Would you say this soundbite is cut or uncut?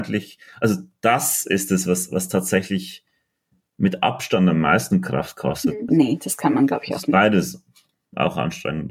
cut